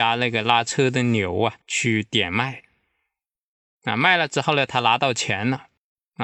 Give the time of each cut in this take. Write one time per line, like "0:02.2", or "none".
none